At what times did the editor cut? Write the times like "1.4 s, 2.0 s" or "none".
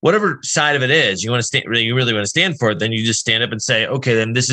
none